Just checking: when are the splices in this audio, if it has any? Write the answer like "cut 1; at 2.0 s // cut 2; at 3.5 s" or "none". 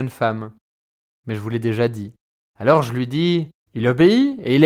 cut 1; at 3.6 s

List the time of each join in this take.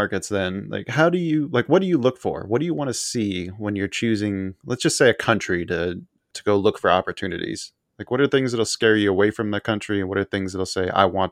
none

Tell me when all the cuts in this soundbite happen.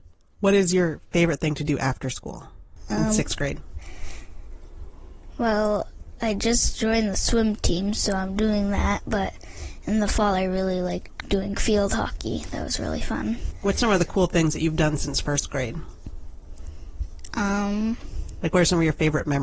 none

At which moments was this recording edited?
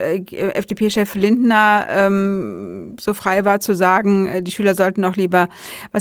none

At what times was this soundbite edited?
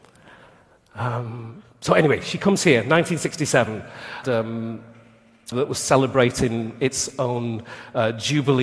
cut 1; at 4.2 s // cut 2; at 5.5 s

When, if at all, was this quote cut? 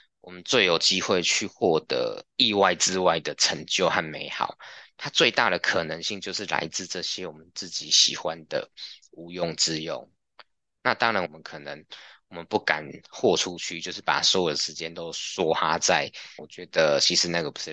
cut 1; at 11.3 s // cut 2; at 16.4 s

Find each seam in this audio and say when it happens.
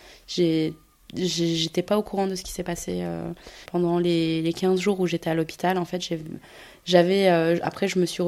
cut 1; at 3.7 s

